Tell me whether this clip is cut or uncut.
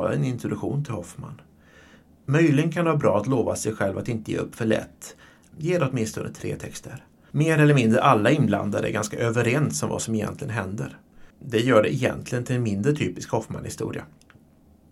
cut